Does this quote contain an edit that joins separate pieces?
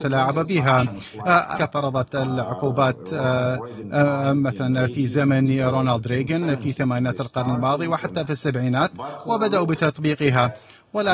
yes; 1 cut; at 1.5 s

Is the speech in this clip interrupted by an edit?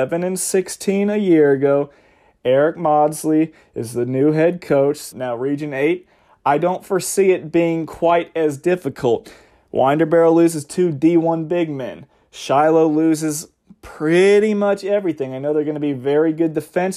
yes; 1 cut; at 5.1 s

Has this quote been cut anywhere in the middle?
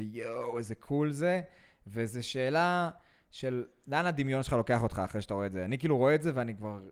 no; 0 cuts

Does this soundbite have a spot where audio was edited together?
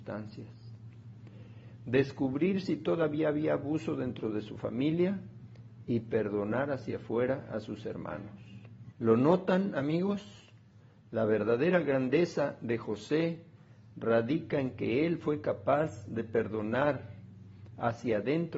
yes; 1 cut; at 8.9 s

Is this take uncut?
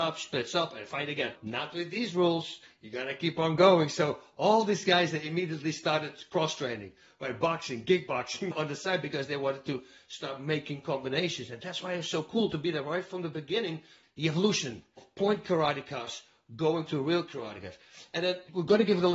no; 1 cut; at 14.0 s

